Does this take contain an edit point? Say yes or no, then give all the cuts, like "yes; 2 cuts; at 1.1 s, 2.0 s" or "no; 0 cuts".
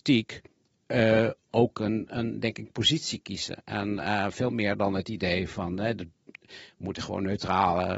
no; 0 cuts